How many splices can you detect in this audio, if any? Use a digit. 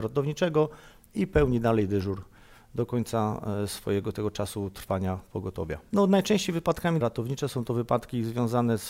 2